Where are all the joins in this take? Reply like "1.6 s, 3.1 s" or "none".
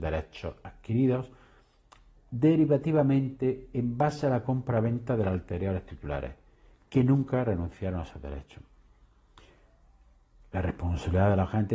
none